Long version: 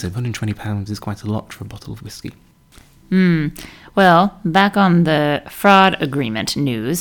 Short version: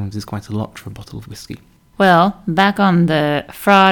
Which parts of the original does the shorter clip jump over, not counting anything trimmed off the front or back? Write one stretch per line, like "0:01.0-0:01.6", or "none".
0:02.7-0:03.9